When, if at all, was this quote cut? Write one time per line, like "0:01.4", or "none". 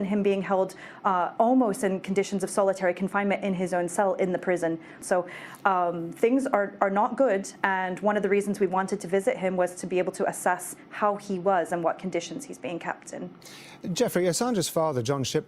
0:05.0